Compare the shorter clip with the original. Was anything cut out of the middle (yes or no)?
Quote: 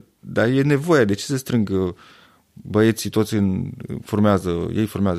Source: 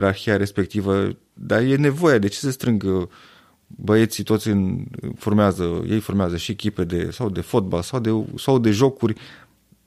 no